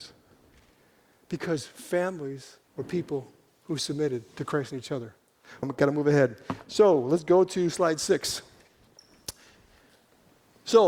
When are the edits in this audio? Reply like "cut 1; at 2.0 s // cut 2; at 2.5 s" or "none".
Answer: cut 1; at 2.6 s // cut 2; at 5.6 s